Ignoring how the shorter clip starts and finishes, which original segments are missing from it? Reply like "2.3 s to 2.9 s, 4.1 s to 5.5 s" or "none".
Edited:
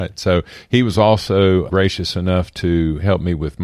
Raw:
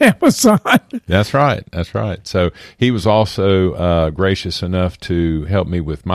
3.7 s to 4.1 s